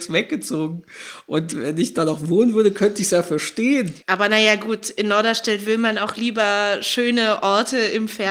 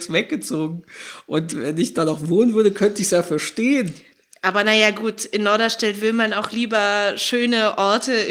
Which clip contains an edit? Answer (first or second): first